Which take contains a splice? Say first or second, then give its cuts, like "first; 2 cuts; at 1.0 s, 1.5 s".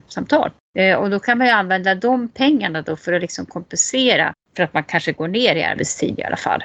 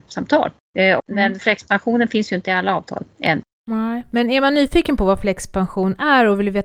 second; 1 cut; at 1.0 s